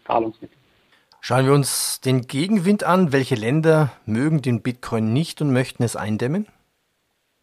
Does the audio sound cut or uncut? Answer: uncut